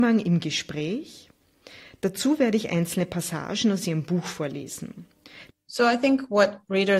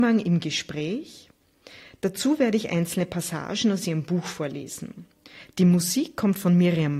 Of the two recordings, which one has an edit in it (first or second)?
first